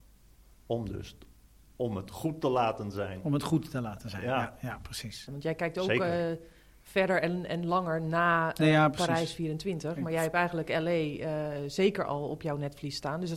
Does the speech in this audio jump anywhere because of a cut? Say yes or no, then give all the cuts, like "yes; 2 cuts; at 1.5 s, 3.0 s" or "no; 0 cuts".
yes; 1 cut; at 5.3 s